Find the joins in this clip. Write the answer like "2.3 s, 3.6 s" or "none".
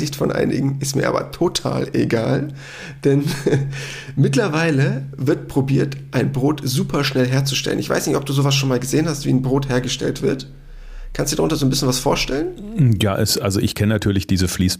none

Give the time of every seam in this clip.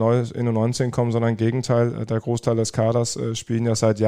none

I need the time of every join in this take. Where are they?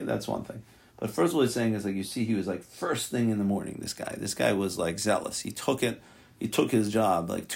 none

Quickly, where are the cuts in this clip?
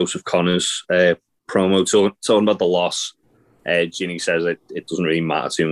none

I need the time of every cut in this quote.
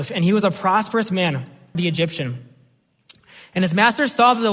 1.7 s

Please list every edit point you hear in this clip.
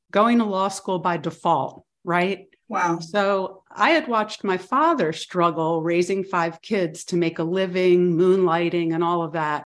2.5 s

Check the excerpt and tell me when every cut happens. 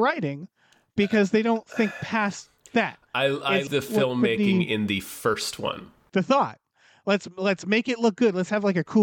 3.7 s, 6.1 s

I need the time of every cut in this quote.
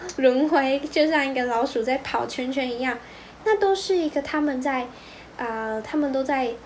3.4 s

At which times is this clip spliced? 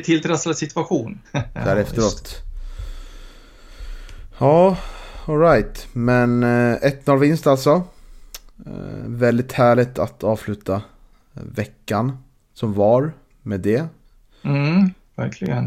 1.2 s

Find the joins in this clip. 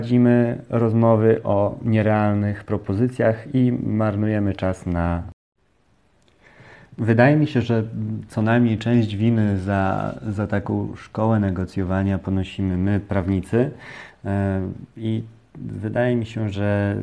none

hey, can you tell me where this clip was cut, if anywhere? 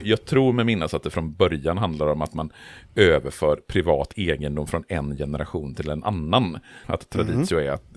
6.8 s

